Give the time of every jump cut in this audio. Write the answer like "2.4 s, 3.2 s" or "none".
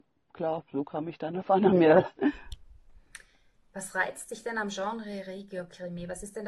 none